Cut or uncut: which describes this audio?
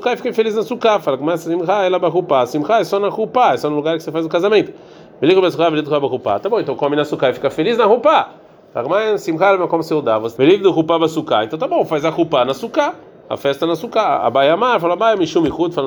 cut